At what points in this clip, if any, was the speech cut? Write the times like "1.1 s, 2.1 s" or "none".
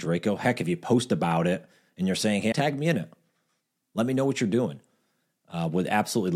2.5 s